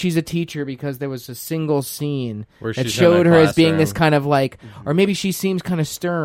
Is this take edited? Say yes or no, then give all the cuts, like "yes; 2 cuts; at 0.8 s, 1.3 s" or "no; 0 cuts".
no; 0 cuts